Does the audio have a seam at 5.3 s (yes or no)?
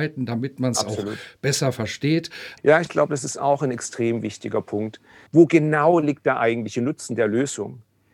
yes